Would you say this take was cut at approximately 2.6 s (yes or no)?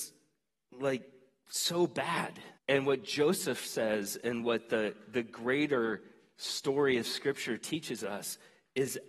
yes